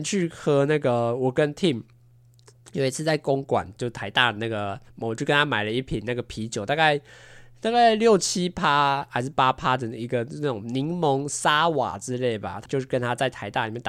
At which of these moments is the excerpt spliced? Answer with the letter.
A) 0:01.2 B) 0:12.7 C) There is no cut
B